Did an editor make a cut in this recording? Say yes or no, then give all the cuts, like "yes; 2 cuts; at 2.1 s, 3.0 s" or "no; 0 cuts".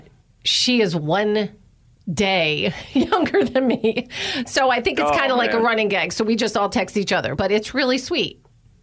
no; 0 cuts